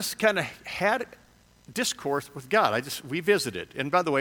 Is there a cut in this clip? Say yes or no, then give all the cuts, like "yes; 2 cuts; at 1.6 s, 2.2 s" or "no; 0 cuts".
no; 0 cuts